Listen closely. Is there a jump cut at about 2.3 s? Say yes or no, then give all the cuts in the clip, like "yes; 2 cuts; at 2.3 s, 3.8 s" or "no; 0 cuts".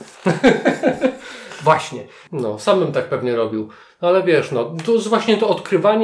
yes; 1 cut; at 2.3 s